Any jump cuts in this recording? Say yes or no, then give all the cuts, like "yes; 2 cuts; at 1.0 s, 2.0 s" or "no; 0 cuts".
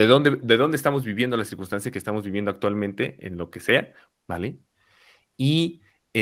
yes; 1 cut; at 4.1 s